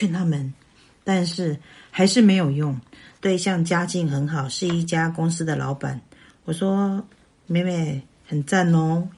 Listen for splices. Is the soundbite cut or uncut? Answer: cut